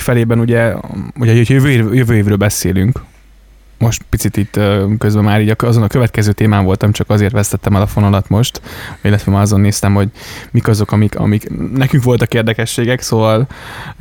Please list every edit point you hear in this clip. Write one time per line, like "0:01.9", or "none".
none